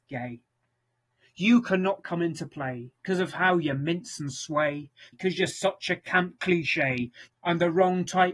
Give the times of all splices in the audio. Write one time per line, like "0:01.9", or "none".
0:05.1
0:07.3